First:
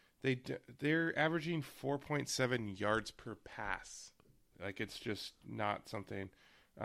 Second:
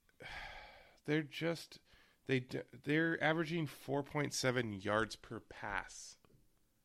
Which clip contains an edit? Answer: first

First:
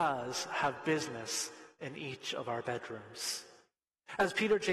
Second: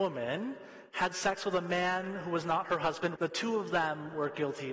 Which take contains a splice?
second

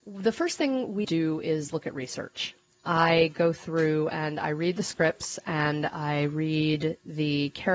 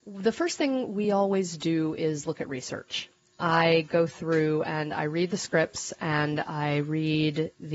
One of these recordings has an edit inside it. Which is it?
first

